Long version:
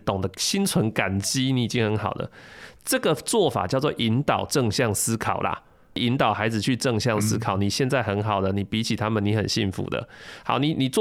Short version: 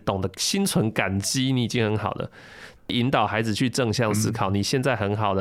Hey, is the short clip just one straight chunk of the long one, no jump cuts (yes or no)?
no